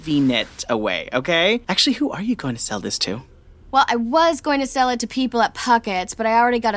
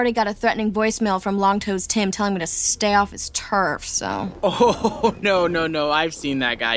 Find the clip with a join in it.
first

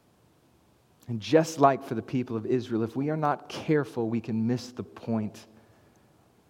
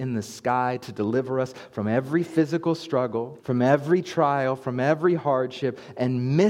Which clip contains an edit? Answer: second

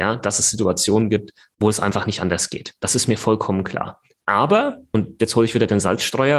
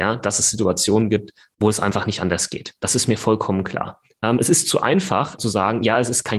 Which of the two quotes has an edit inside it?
second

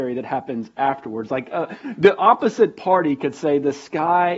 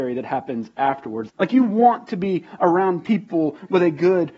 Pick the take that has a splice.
second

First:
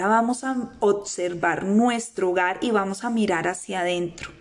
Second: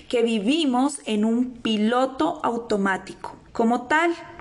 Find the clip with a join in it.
second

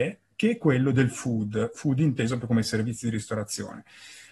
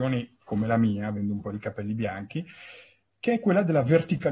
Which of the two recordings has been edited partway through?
first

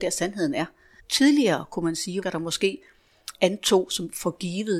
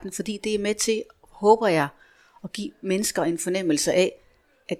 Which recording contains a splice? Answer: first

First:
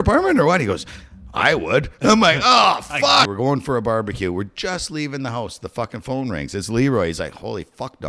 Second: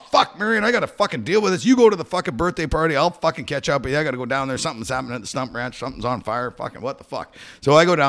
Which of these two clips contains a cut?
first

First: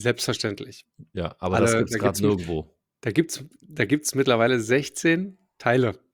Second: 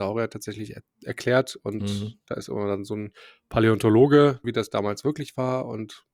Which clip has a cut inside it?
second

